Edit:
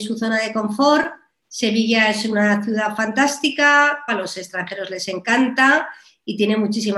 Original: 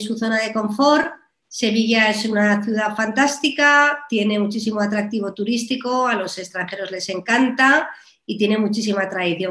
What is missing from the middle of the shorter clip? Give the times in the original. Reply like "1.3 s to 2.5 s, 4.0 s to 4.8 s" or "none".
4.1 s to 6.1 s